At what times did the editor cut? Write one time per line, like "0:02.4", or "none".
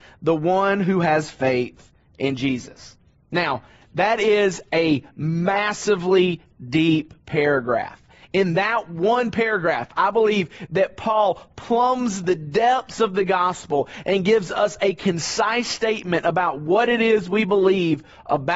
none